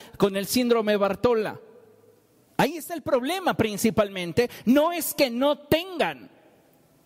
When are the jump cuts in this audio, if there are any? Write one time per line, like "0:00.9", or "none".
0:02.5